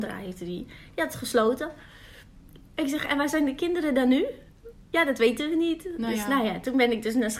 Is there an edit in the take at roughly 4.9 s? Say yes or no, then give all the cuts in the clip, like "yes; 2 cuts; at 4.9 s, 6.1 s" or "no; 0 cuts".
no; 0 cuts